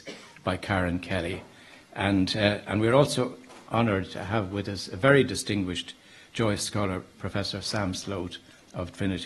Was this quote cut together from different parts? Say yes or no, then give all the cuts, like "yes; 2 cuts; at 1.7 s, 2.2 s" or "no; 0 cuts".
no; 0 cuts